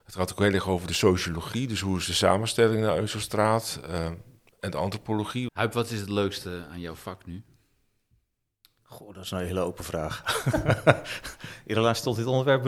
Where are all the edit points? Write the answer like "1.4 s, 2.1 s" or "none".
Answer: 5.5 s